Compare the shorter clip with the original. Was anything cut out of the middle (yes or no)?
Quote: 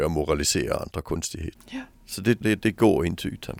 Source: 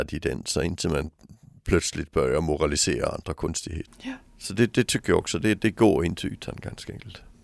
yes